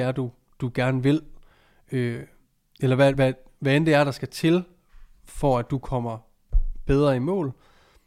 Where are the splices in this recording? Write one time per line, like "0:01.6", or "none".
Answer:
none